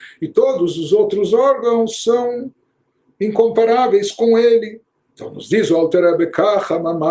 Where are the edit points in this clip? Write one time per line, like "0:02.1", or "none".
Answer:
0:05.1

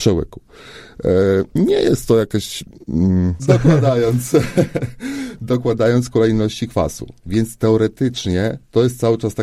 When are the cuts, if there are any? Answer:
0:03.4

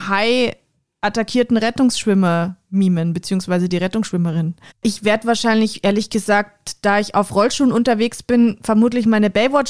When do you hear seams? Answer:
0:04.7

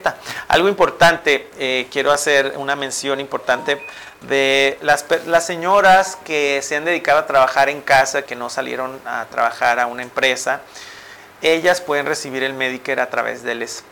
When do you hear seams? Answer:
0:08.3

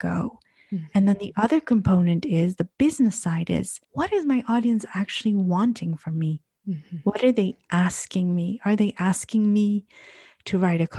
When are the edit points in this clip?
0:03.8

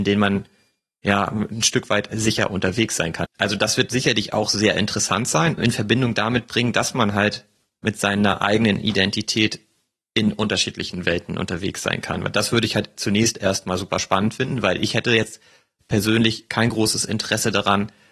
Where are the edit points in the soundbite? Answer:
0:03.2
0:05.6

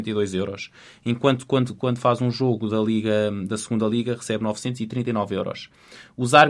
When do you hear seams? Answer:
none

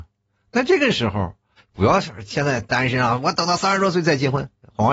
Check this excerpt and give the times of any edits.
0:01.6

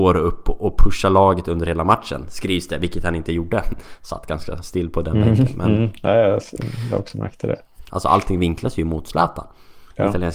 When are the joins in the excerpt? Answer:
0:07.9

